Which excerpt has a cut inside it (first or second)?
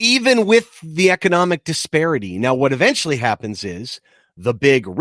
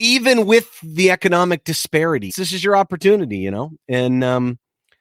second